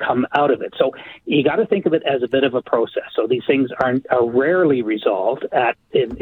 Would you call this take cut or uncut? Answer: uncut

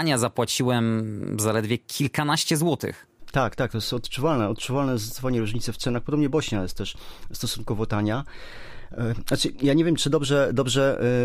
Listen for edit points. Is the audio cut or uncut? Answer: uncut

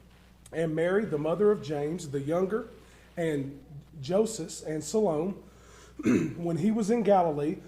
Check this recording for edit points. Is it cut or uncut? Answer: uncut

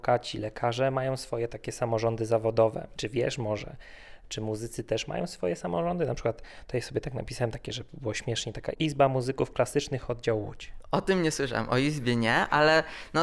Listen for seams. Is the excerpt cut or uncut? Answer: uncut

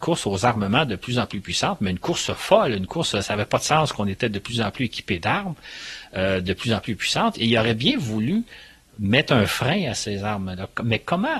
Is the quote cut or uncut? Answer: uncut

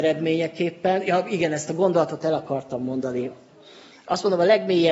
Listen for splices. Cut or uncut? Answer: uncut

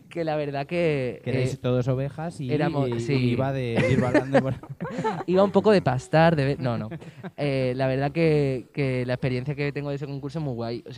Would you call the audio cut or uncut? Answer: uncut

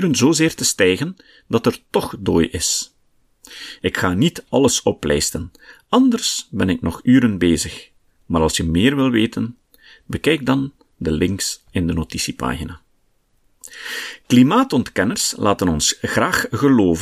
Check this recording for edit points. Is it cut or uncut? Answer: cut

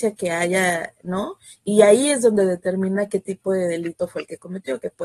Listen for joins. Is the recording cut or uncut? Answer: uncut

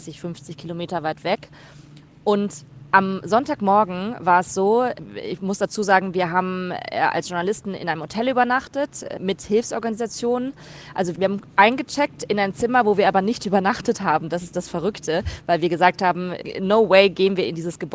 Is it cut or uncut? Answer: uncut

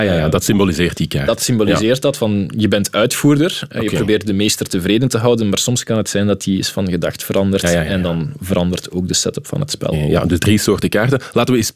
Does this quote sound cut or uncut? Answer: uncut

